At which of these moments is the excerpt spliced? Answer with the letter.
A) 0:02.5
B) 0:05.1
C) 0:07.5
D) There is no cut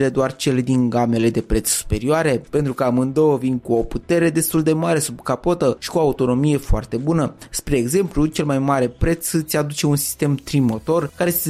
A